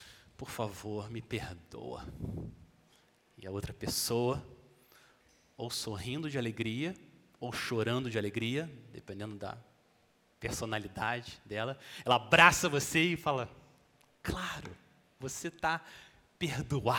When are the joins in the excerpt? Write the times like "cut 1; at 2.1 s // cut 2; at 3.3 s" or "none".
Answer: cut 1; at 15.2 s

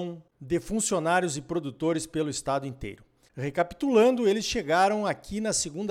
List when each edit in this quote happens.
cut 1; at 3.3 s

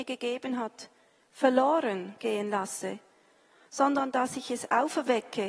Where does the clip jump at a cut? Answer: none

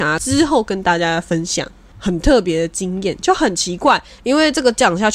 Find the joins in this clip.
cut 1; at 1.9 s // cut 2; at 4.2 s

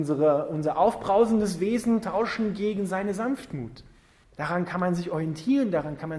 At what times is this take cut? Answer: cut 1; at 4.2 s

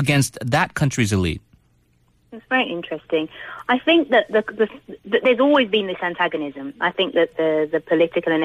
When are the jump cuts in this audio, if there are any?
none

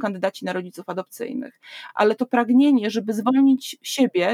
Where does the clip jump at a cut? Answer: none

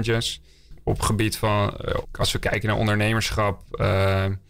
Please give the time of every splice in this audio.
cut 1; at 2.0 s

